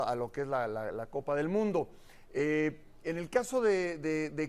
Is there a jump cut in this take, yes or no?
no